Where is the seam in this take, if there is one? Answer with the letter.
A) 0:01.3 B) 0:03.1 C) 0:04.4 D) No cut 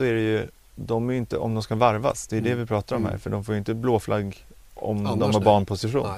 D